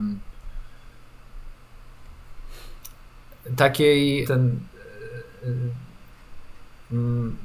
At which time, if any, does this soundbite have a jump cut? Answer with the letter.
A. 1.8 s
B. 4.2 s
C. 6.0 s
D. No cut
B